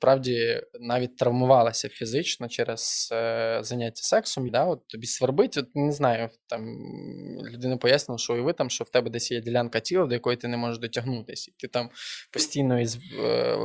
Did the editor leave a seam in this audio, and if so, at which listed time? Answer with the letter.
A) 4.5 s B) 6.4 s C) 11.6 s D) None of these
A